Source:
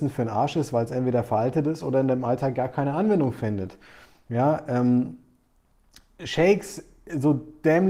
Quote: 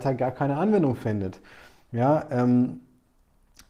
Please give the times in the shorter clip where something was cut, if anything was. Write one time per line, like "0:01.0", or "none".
none